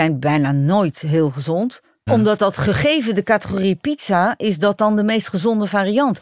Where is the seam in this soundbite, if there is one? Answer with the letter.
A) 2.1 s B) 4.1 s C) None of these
A